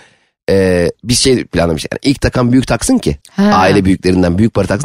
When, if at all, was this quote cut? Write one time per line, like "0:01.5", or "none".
0:03.2